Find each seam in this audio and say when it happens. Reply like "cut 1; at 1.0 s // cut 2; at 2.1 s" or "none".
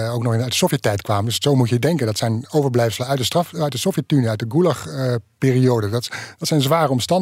none

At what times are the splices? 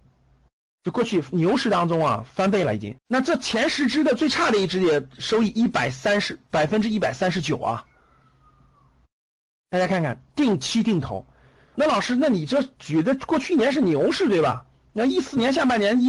cut 1; at 3.0 s // cut 2; at 11.7 s

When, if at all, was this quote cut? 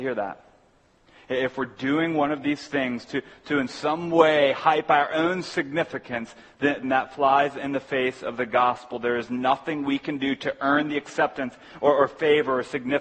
cut 1; at 6.8 s

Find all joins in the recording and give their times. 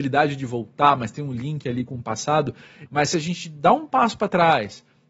cut 1; at 2.9 s

